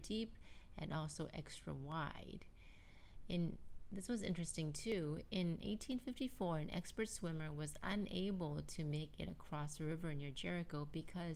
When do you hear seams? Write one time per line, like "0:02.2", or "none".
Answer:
none